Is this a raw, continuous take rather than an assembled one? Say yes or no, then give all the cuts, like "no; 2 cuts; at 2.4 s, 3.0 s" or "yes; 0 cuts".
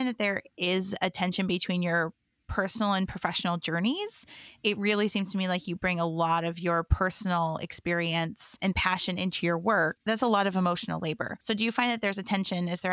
yes; 0 cuts